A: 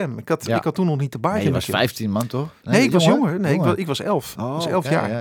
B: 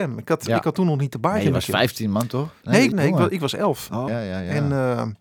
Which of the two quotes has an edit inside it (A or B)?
B